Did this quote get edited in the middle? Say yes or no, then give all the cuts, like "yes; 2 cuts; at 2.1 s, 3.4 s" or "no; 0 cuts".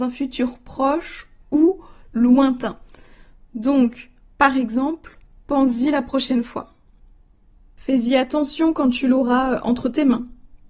no; 0 cuts